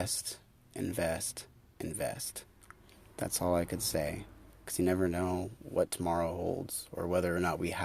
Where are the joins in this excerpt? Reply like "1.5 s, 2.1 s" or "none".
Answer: none